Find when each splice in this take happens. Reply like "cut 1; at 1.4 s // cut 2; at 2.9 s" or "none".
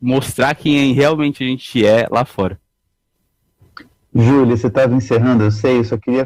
none